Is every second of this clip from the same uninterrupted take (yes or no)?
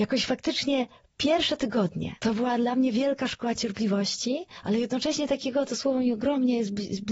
no